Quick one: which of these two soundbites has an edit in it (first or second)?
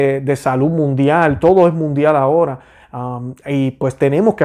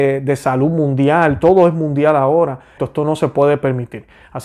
second